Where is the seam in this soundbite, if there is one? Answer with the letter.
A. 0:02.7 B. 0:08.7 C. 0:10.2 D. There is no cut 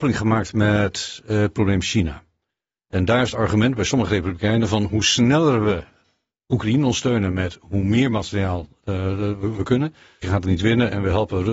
C